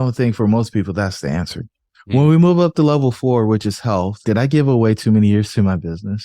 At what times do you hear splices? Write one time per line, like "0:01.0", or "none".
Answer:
0:04.2